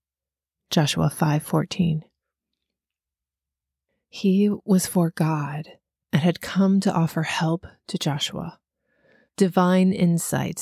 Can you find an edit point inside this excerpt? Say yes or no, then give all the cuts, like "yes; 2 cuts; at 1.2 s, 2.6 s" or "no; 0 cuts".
no; 0 cuts